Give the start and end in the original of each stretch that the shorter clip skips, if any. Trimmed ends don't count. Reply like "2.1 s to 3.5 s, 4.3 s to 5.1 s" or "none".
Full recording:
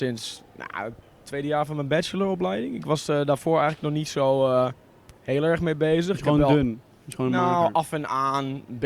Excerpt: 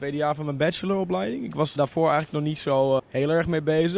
3.1 s to 3.3 s, 4.5 s to 5.1 s